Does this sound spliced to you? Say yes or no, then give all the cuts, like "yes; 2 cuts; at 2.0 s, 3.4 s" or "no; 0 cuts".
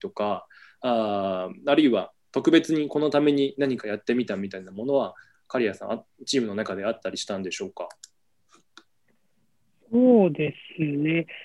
no; 0 cuts